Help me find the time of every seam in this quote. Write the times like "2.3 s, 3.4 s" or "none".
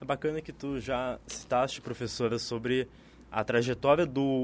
none